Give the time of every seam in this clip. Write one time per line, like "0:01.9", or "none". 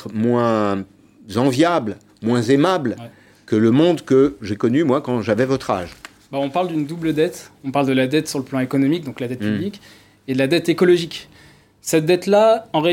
none